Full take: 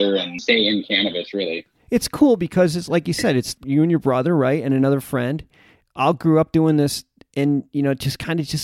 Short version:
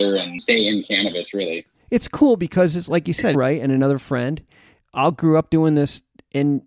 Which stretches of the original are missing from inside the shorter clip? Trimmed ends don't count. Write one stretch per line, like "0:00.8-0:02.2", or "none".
0:03.3-0:04.4

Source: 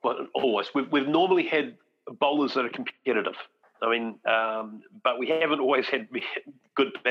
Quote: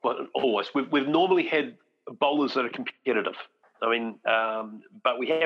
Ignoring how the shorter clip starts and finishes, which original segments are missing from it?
none

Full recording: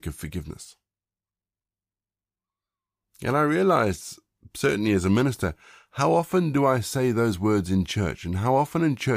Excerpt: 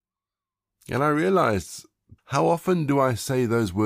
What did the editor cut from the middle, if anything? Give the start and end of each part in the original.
0:04.5-0:05.8

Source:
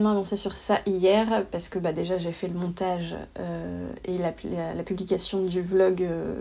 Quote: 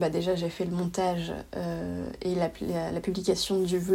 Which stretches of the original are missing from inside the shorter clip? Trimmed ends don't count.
none

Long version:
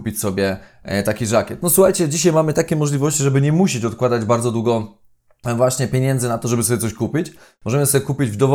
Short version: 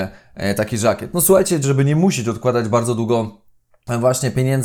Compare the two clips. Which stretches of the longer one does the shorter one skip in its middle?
0:02.1-0:03.2

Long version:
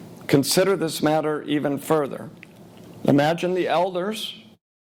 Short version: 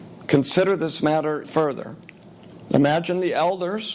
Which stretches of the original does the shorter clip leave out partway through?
0:01.4-0:01.8

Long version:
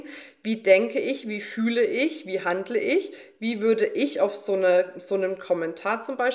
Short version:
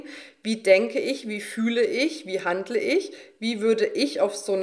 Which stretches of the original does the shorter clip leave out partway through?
none

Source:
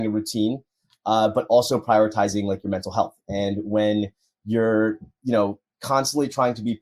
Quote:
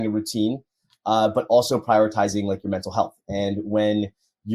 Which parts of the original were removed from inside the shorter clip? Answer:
none

